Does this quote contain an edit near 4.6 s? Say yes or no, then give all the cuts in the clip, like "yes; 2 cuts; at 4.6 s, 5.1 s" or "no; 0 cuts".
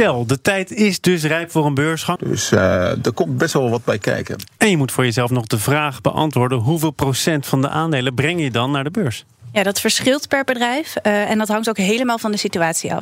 no; 1 cut; at 2.2 s